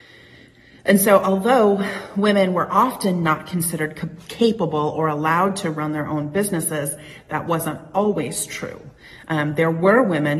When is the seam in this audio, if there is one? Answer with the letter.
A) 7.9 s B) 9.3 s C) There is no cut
C